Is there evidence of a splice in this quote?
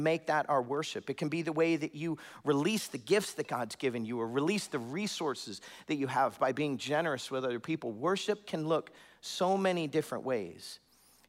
no; 0 cuts

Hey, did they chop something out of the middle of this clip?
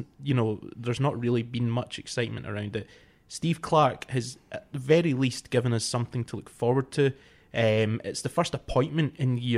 no; 0 cuts

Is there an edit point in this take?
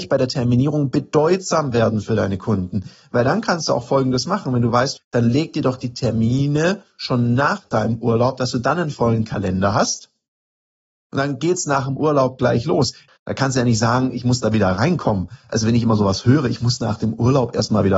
yes; 2 cuts; at 5.0 s, 13.1 s

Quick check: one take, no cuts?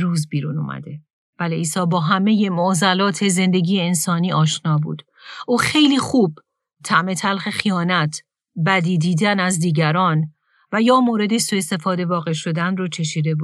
yes; 0 cuts

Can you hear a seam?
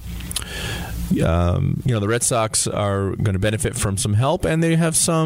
no; 0 cuts

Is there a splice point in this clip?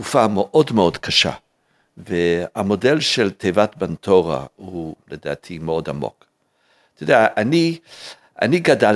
no; 0 cuts

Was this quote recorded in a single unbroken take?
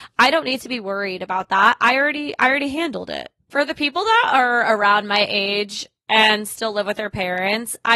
yes; 0 cuts

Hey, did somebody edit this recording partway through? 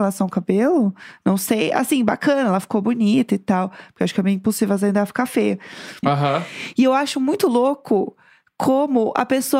yes; 1 cut; at 6.0 s

